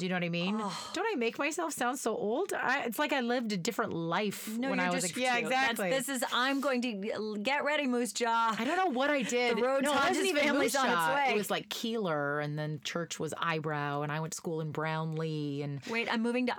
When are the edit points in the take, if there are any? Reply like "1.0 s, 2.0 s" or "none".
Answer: 5.1 s